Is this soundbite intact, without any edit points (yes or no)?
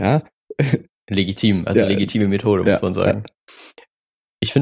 yes